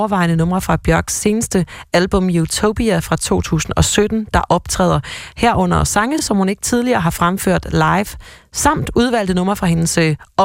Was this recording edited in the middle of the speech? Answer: no; 0 cuts

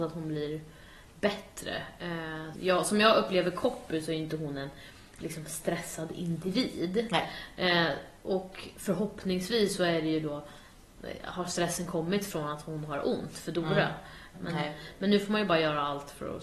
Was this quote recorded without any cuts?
no; 2 cuts; at 2.5 s, 14.3 s

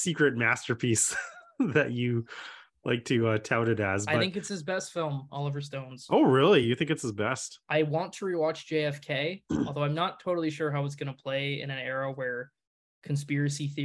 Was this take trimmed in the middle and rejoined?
no; 0 cuts

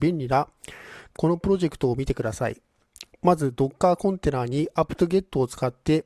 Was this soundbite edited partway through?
yes; 1 cut; at 1.1 s

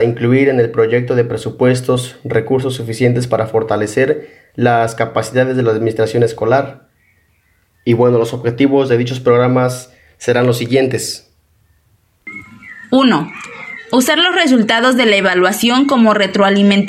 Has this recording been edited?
no; 0 cuts

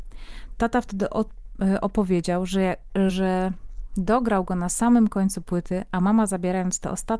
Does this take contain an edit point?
no; 0 cuts

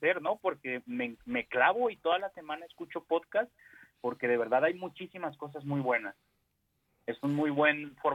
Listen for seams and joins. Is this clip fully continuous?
yes; 0 cuts

